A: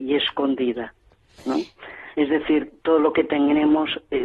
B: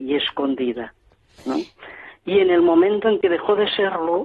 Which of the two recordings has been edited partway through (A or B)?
A